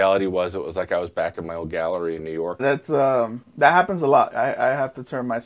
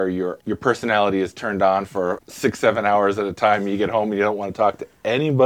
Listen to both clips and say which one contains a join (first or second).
first